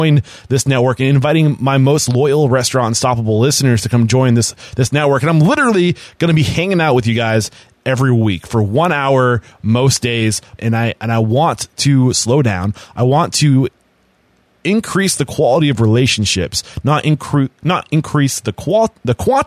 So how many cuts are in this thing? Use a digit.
1